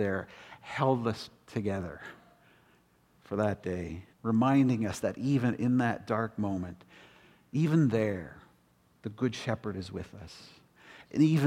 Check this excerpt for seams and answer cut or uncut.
cut